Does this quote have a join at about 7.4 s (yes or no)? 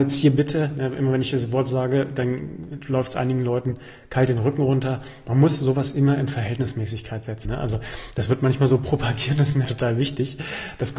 yes